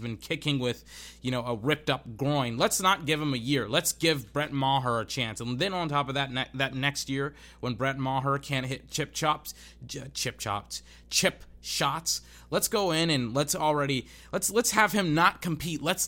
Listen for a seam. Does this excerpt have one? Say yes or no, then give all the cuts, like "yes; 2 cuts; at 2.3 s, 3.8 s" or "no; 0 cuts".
no; 0 cuts